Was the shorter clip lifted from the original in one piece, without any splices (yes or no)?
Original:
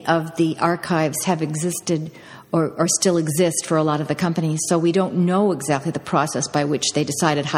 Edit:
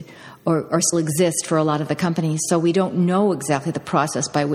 no